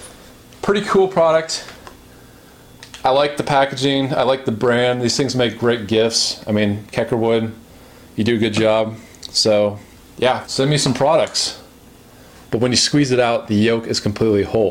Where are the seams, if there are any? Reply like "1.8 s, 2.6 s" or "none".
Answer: 10.4 s, 12.4 s